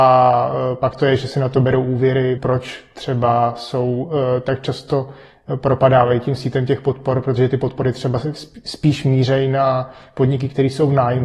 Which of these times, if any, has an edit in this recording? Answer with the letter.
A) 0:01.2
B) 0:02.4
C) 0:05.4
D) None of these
B